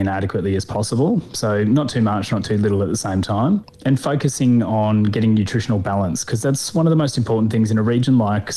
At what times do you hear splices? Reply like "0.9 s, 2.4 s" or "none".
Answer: none